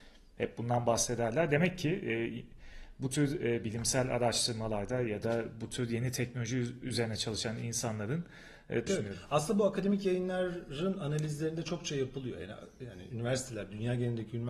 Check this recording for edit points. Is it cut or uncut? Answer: cut